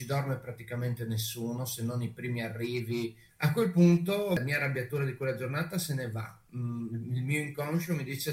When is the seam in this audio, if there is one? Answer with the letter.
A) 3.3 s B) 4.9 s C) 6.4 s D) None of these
A